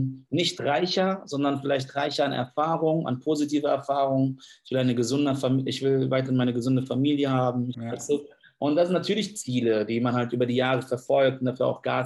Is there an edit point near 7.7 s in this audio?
yes; 1 cut; at 7.7 s

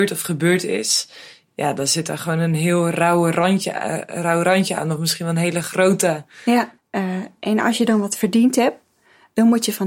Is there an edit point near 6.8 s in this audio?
yes; 1 cut; at 6.8 s

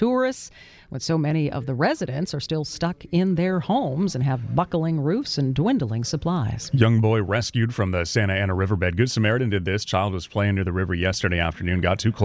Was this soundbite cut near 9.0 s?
no; 0 cuts

